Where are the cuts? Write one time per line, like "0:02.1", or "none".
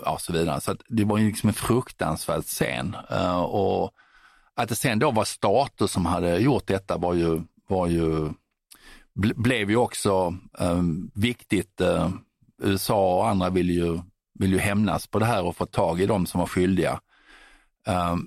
none